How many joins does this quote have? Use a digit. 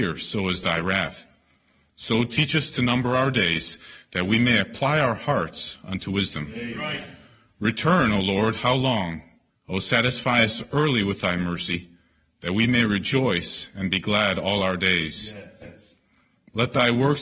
2